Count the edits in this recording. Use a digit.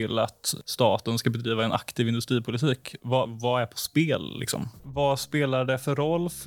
2